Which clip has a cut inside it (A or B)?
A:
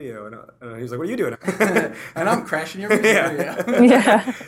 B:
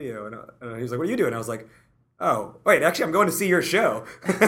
A